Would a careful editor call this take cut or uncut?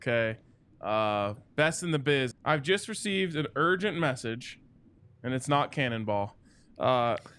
cut